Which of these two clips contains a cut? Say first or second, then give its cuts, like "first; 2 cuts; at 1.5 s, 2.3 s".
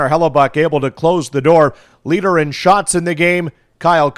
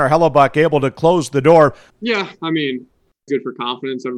second; 2 cuts; at 1.9 s, 3.3 s